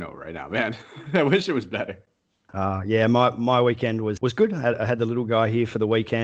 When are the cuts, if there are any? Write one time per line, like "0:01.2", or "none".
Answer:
0:02.5
0:04.2